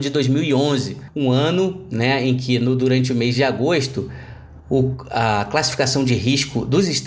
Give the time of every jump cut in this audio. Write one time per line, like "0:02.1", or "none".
none